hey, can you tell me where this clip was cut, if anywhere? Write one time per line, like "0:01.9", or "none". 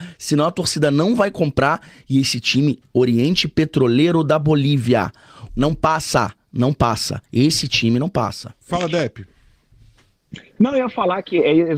0:05.5